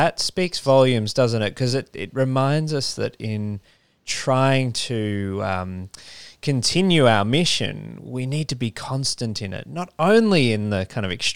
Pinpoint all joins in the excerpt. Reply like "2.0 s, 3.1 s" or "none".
none